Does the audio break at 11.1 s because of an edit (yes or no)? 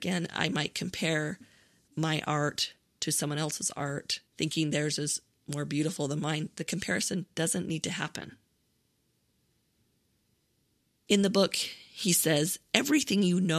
yes